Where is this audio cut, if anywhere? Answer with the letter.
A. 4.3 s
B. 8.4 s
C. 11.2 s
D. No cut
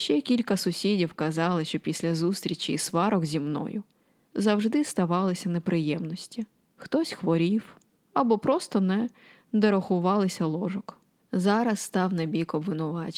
C